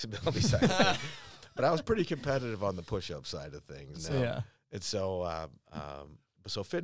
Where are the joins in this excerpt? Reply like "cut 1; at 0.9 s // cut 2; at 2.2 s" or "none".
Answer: cut 1; at 3.9 s